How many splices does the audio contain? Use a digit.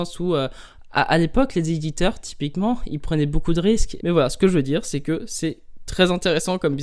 1